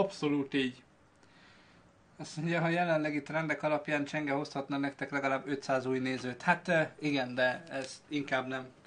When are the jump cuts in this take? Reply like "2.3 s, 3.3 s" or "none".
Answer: none